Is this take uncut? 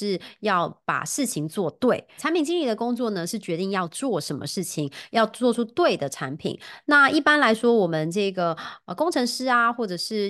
no; 1 cut; at 2.2 s

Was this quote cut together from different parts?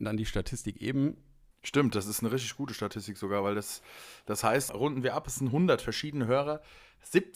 yes; 2 cuts; at 1.5 s, 4.7 s

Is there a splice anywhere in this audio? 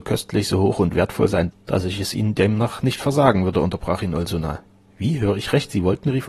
yes; 1 cut; at 1.5 s

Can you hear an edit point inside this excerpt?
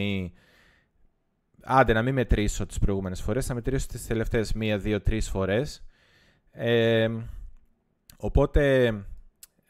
no; 0 cuts

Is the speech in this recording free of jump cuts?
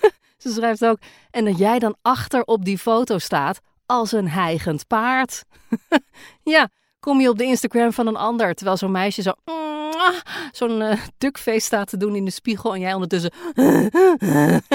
yes; 0 cuts

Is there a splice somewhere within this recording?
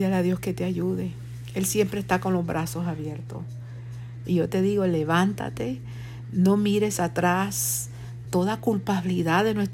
yes; 2 cuts; at 4.2 s, 8.2 s

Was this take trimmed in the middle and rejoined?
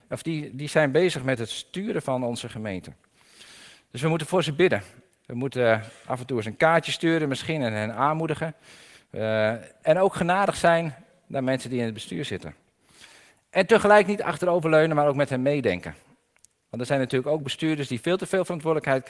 no; 0 cuts

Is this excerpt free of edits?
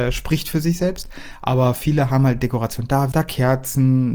no; 1 cut; at 3.1 s

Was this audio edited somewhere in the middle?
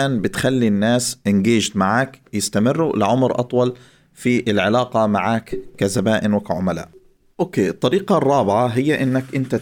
no; 0 cuts

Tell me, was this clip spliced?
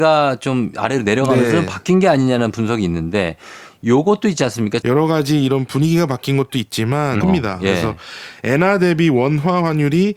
yes; 2 cuts; at 4.8 s, 7.2 s

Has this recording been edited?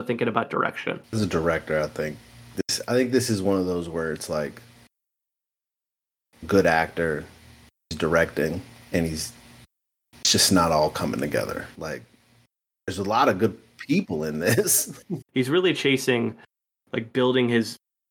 yes; 2 cuts; at 11.7 s, 15.2 s

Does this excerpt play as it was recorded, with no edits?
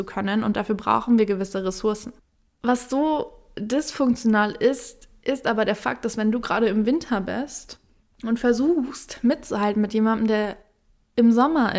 yes; 0 cuts

